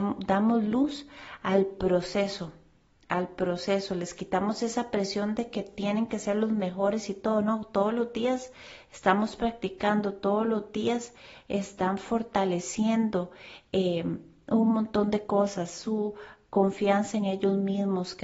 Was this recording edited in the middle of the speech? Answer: no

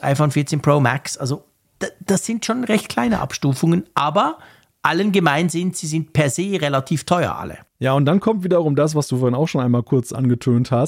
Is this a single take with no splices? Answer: no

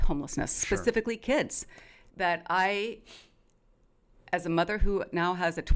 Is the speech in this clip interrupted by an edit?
no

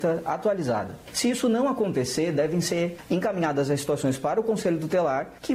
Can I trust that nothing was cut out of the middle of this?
yes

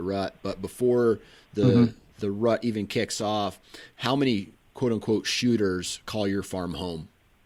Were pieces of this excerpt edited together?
no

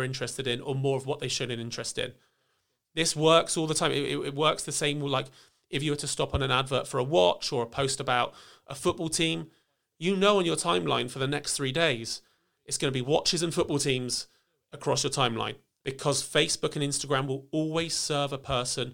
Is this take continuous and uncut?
no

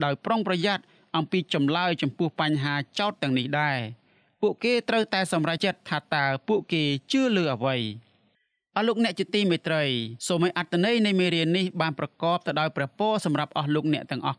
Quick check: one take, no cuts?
no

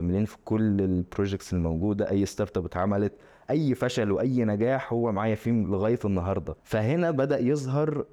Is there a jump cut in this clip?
yes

